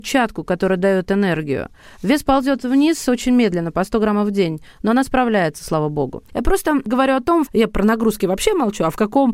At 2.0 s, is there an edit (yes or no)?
no